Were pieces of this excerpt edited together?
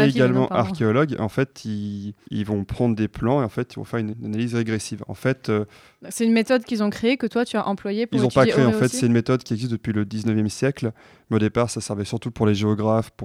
yes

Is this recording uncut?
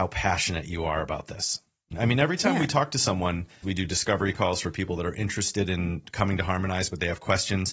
no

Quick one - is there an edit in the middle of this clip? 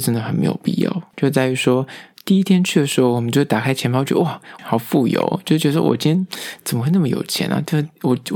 yes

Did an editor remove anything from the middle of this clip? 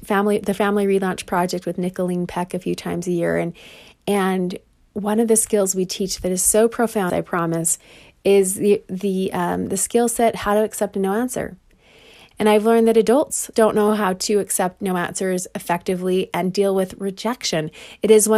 yes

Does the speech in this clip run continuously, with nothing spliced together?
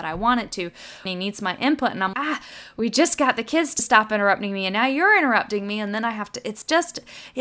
no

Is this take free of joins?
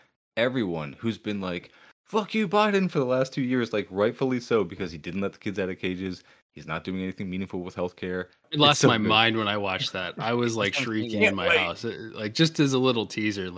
no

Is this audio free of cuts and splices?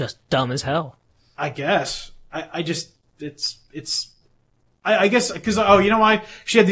yes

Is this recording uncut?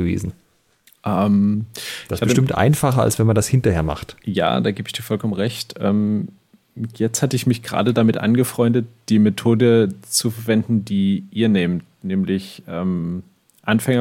yes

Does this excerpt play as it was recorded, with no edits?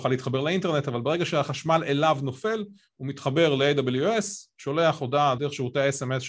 no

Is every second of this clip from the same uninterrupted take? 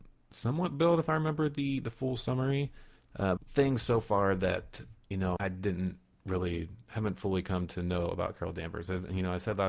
no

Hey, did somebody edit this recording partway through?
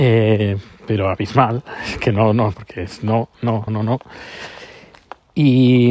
yes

